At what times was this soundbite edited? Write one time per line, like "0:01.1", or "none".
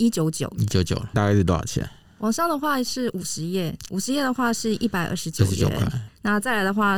0:01.1
0:03.9
0:06.1